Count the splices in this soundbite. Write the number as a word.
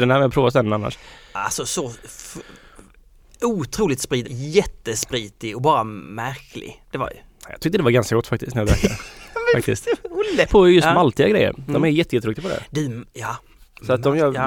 two